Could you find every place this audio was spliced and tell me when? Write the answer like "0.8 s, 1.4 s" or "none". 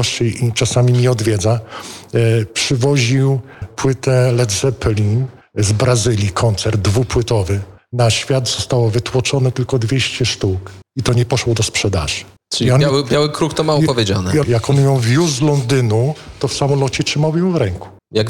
3.6 s, 14.4 s

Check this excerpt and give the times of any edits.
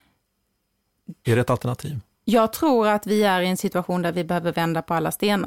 1.2 s

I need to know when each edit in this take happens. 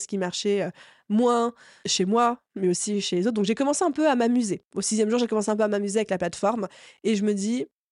none

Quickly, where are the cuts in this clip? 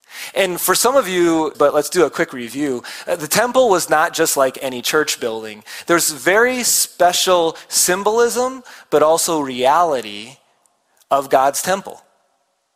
1.5 s

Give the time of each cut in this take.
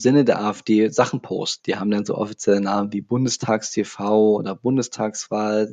1.6 s

